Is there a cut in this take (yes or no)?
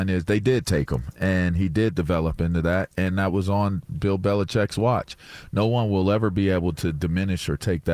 no